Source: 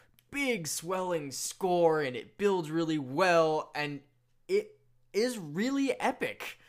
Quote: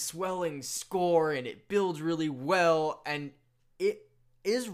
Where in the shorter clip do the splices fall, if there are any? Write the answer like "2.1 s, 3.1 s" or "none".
none